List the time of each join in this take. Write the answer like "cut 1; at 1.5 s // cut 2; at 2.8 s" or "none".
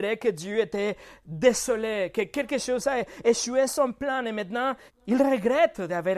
cut 1; at 4.9 s